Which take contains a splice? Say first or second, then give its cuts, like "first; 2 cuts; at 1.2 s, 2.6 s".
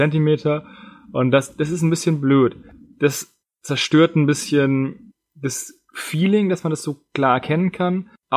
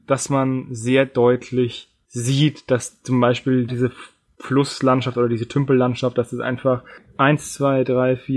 second; 1 cut; at 3.7 s